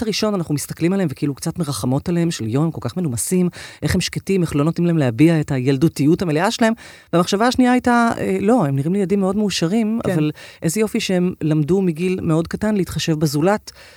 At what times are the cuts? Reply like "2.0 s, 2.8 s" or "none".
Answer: none